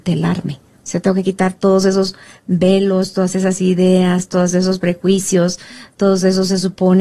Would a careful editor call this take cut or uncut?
uncut